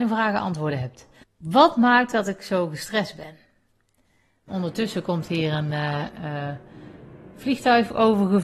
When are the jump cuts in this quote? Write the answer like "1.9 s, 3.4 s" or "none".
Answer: 1.2 s, 4.5 s